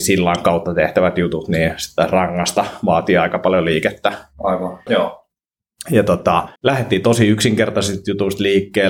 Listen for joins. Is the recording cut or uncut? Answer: cut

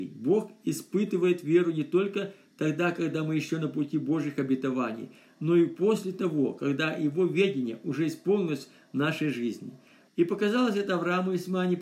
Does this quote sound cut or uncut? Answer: cut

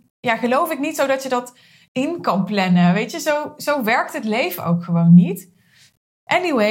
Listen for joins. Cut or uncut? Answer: uncut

